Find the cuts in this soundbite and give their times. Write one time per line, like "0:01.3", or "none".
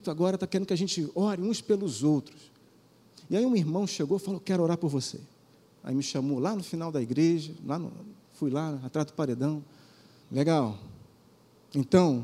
0:10.2

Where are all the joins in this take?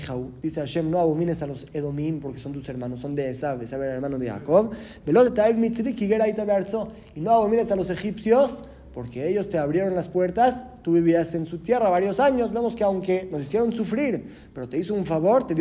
none

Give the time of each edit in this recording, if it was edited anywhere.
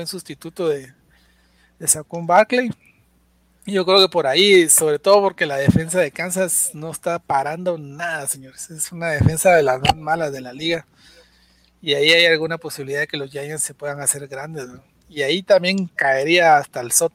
none

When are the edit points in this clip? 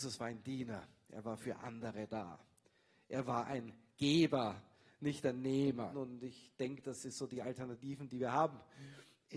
0:05.9

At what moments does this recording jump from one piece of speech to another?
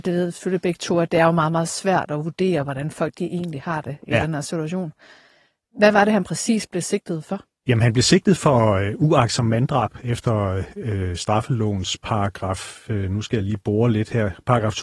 none

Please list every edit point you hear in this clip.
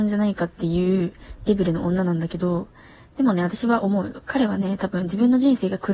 none

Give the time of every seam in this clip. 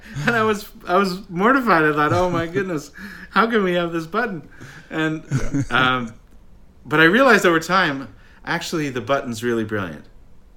none

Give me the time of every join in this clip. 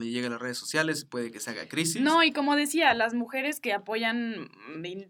none

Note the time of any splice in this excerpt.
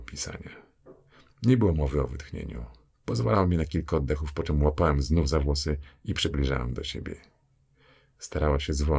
0:01.3
0:02.9

